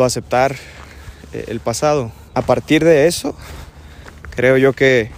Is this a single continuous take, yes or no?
no